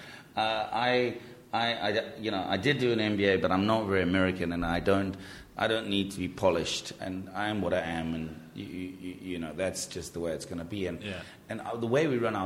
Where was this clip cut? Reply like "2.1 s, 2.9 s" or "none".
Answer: 7.0 s